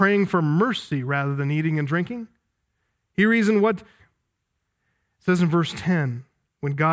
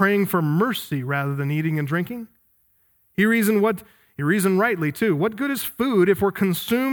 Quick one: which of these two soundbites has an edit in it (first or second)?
first